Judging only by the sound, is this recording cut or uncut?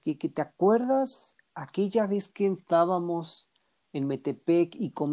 uncut